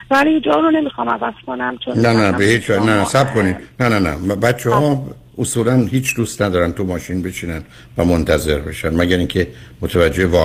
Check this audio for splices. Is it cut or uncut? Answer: uncut